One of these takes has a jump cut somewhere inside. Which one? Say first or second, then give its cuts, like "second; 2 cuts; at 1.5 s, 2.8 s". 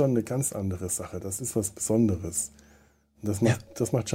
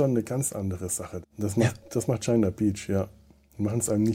second; 1 cut; at 1.2 s